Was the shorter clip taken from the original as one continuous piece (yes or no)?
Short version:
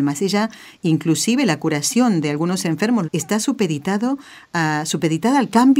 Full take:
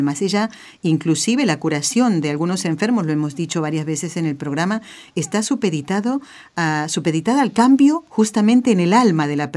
no